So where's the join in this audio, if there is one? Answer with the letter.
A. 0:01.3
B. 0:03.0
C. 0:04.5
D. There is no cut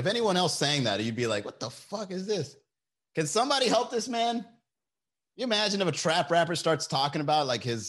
D